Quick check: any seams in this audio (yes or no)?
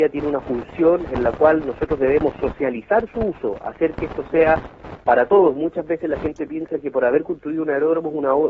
no